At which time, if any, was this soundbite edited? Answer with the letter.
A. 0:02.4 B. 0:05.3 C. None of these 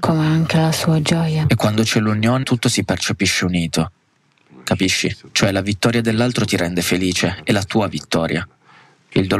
A